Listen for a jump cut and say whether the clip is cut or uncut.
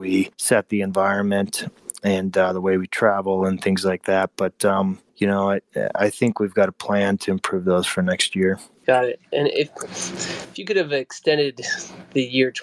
uncut